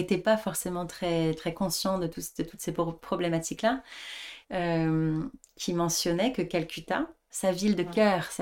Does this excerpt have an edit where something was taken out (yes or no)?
yes